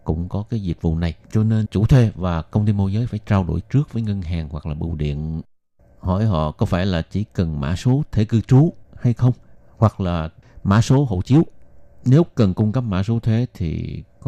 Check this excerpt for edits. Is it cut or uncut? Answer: cut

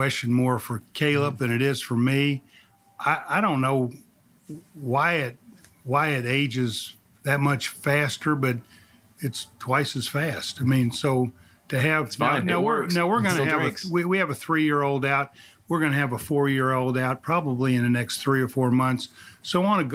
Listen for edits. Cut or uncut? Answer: uncut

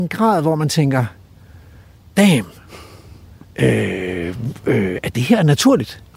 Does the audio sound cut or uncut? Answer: uncut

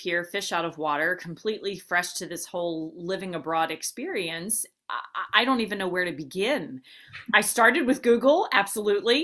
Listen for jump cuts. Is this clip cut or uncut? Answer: uncut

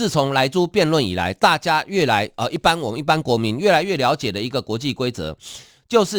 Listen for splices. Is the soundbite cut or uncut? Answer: uncut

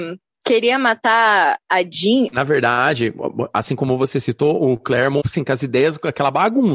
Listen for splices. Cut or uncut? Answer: cut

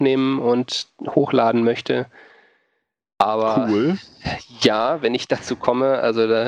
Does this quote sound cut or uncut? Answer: uncut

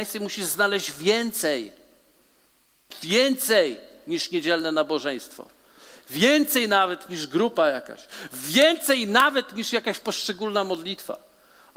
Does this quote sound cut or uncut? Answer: uncut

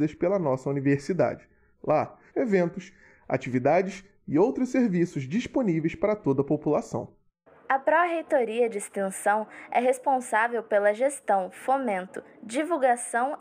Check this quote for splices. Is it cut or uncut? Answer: cut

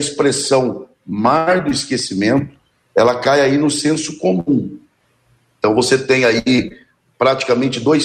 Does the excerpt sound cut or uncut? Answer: uncut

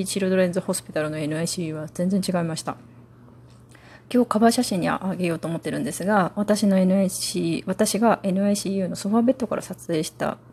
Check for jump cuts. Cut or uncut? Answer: uncut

